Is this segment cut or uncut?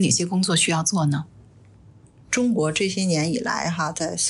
uncut